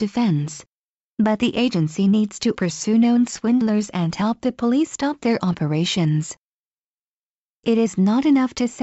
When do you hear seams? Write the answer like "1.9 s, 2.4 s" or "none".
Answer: 2.5 s